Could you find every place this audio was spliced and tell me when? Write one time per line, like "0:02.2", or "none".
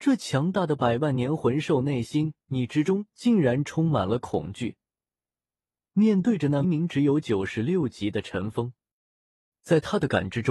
0:06.6